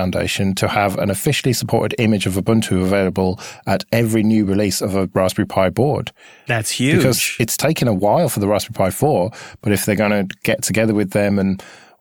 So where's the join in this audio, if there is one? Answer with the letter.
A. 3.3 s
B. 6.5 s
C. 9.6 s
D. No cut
B